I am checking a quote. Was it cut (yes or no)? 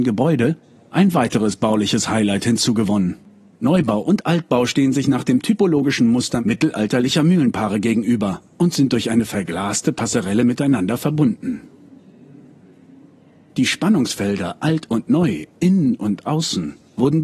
no